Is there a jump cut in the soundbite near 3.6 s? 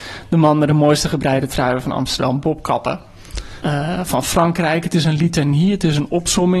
yes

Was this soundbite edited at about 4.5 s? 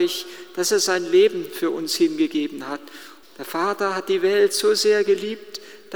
no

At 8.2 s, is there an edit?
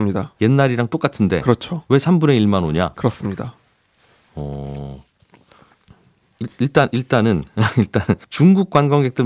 yes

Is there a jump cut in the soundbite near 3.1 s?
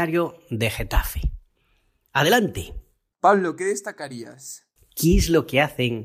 yes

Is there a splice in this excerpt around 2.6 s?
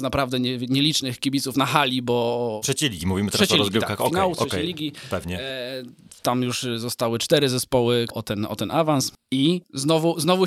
yes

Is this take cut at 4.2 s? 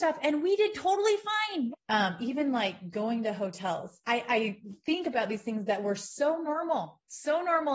no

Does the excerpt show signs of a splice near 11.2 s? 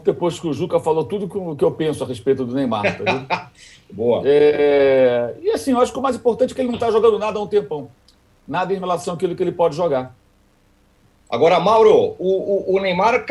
yes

